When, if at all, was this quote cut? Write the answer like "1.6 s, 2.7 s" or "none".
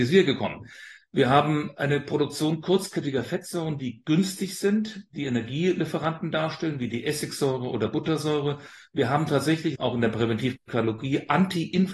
1.0 s, 9.7 s

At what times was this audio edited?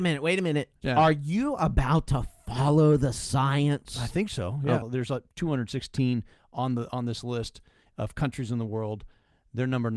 4.8 s

